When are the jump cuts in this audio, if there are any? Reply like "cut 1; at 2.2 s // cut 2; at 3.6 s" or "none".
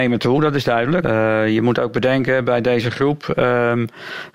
cut 1; at 1.0 s